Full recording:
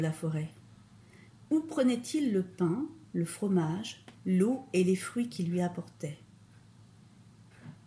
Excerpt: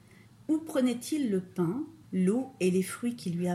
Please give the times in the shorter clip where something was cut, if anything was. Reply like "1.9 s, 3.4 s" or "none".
2.0 s